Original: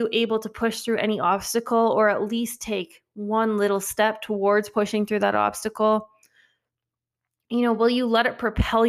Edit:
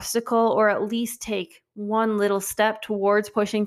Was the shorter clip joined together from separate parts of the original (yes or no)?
no